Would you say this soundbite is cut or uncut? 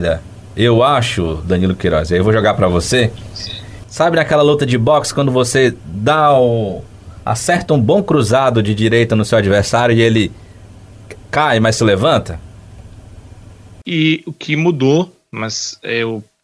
cut